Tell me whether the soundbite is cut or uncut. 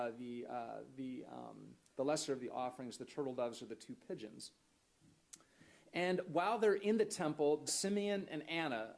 cut